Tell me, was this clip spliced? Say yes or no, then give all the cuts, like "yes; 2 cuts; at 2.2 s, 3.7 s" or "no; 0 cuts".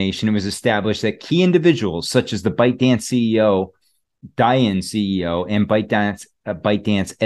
no; 0 cuts